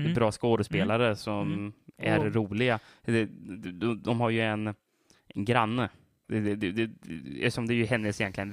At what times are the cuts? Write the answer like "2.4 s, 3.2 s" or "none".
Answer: 6.2 s